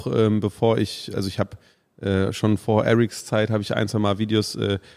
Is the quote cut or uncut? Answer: uncut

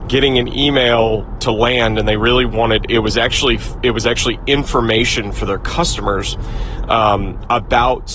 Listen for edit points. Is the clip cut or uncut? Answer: uncut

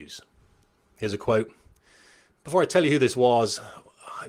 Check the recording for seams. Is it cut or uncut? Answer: uncut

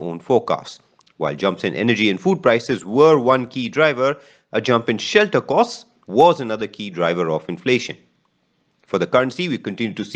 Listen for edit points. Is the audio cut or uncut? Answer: cut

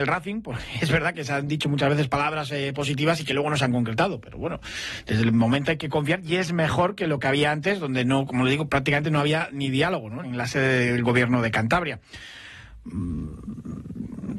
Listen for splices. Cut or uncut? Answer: cut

